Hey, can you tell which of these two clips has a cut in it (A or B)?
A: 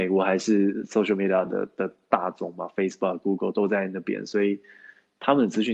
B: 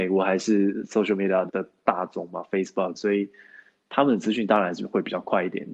B